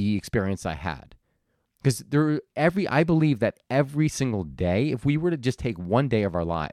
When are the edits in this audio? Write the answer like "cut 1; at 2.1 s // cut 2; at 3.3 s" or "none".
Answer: cut 1; at 1.7 s